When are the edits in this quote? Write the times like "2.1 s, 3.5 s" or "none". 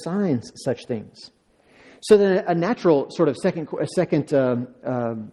none